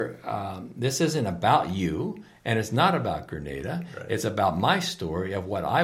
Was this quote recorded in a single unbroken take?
yes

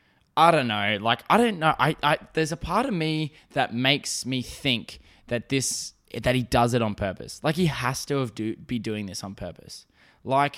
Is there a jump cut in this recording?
no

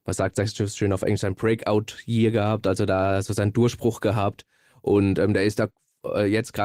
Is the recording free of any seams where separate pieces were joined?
yes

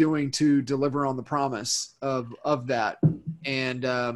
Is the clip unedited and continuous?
yes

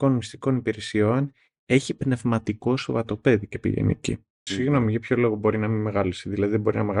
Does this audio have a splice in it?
yes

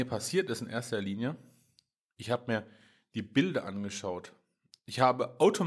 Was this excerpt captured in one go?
yes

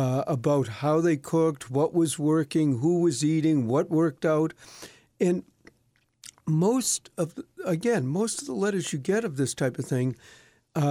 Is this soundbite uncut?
yes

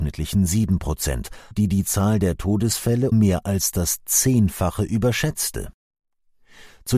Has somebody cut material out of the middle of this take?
yes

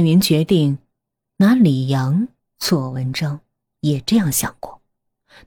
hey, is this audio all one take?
no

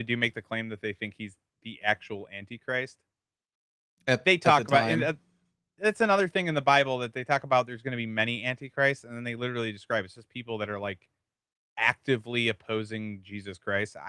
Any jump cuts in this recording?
no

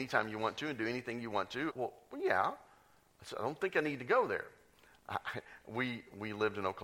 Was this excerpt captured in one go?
no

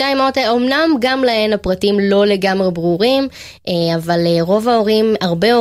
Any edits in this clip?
no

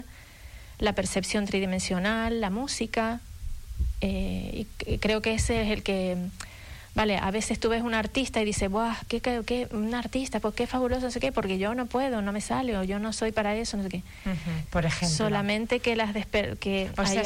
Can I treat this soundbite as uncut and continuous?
no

